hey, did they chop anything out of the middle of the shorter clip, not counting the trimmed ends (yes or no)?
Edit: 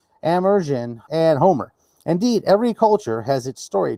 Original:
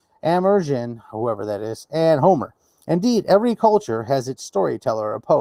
yes